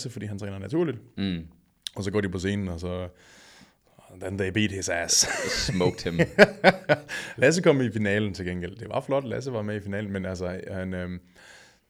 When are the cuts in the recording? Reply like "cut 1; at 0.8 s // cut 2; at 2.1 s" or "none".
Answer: none